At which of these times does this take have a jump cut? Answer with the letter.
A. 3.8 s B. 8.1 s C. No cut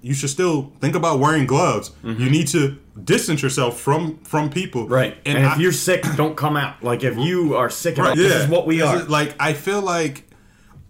B